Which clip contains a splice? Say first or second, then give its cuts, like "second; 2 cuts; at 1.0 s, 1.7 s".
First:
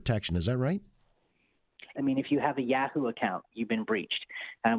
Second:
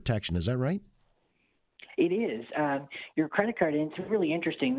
first; 1 cut; at 1.9 s